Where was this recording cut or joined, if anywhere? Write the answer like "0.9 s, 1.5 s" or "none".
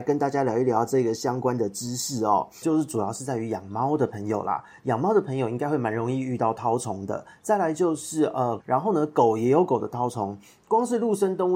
2.6 s, 8.6 s